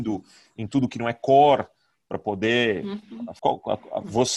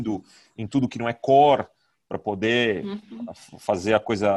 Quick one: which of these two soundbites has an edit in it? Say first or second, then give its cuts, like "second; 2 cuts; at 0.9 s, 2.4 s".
first; 1 cut; at 3.4 s